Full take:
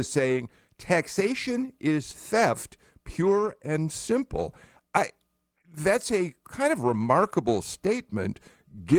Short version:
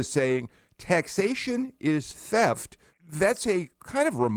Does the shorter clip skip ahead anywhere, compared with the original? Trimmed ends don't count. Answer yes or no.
yes